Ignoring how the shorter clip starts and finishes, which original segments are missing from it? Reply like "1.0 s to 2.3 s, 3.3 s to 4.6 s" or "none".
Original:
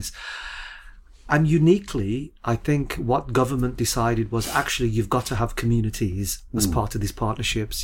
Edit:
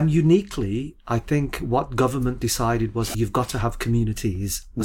4.5 s to 4.9 s